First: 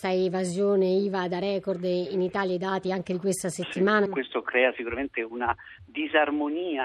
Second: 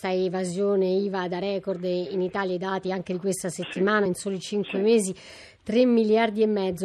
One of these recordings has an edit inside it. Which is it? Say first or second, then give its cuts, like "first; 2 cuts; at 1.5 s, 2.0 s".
first; 1 cut; at 4.1 s